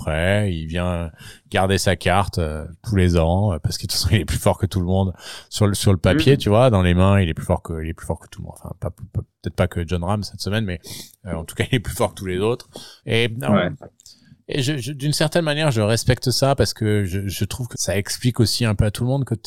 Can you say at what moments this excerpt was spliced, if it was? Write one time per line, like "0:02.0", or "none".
0:13.0
0:17.7